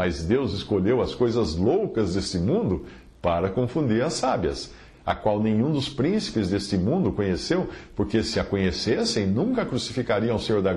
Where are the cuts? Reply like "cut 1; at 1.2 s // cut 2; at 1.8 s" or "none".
cut 1; at 4.9 s

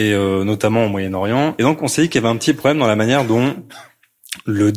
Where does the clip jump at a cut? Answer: cut 1; at 1.6 s

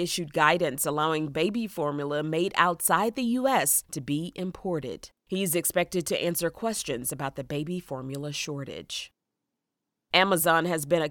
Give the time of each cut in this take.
cut 1; at 5.2 s

